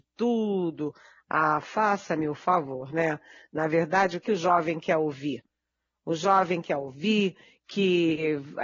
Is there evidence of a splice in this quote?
yes; 1 cut; at 4.2 s

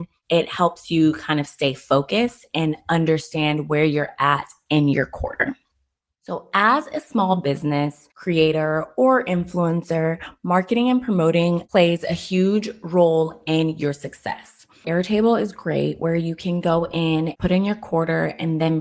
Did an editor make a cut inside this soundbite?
yes; 1 cut; at 14.8 s

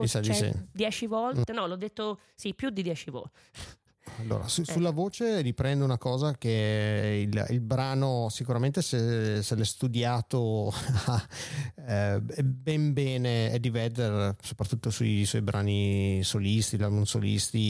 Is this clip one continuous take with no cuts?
yes; 0 cuts

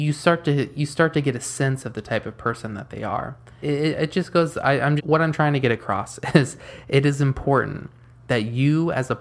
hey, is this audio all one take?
no; 2 cuts; at 3.6 s, 5.0 s

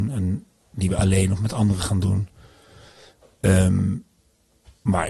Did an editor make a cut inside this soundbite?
no; 0 cuts

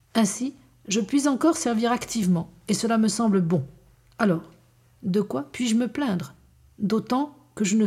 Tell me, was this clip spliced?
no; 0 cuts

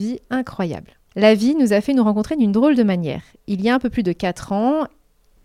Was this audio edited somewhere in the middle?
yes; 1 cut; at 1.1 s

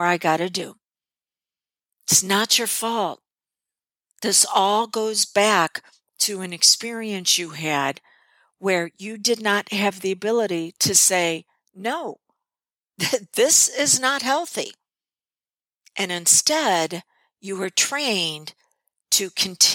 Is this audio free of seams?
yes; 0 cuts

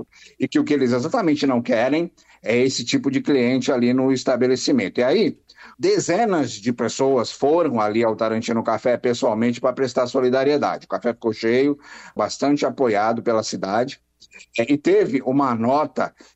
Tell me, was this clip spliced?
yes; 2 cuts; at 5.7 s, 12.2 s

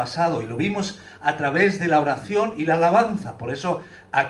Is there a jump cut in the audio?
no; 0 cuts

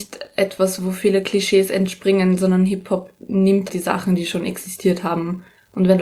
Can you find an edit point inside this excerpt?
yes; 1 cut; at 3.7 s

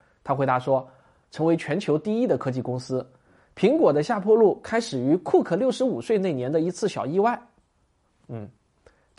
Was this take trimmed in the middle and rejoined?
yes; 1 cut; at 1.2 s

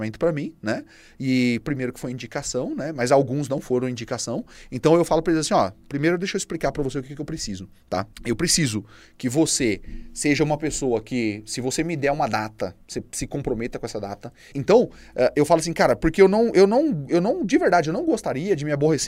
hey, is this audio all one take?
no; 2 cuts; at 8.1 s, 14.5 s

